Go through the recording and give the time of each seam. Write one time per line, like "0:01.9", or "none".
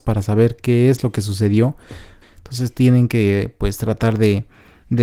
0:02.2